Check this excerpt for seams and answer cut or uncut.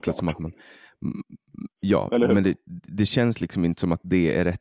cut